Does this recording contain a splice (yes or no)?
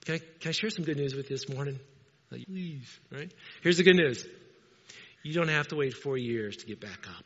yes